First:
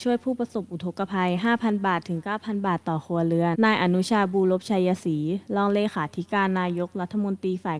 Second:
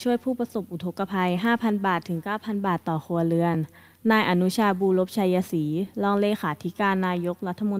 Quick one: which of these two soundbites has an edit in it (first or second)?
first